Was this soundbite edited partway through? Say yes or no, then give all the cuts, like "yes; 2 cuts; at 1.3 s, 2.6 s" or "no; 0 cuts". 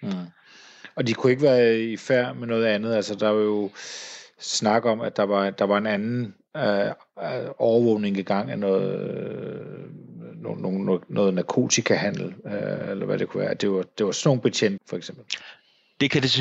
yes; 1 cut; at 14.8 s